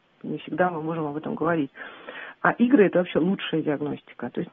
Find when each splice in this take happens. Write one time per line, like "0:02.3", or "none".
none